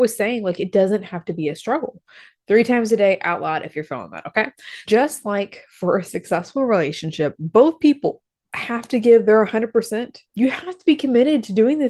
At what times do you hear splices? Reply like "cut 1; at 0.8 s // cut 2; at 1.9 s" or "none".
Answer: cut 1; at 4.9 s // cut 2; at 10.2 s

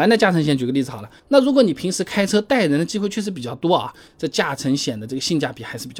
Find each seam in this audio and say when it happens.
cut 1; at 1.2 s // cut 2; at 4.1 s

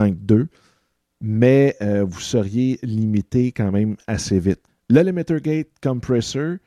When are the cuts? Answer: cut 1; at 4.7 s

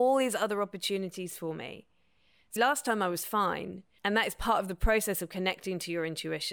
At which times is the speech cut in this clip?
cut 1; at 2.6 s // cut 2; at 4.0 s

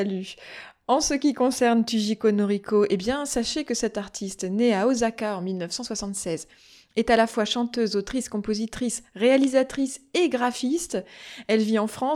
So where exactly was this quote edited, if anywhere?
none

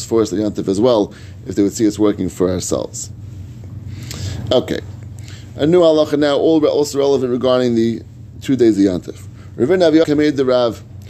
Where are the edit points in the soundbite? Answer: cut 1; at 10.0 s

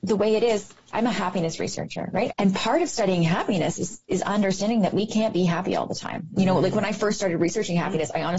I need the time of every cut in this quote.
cut 1; at 2.3 s

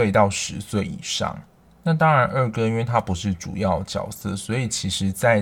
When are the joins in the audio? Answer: none

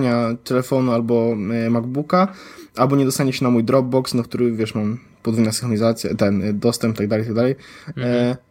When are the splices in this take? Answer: none

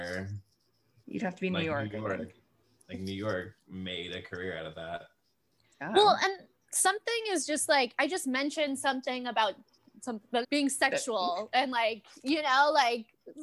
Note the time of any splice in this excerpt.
cut 1; at 10.4 s

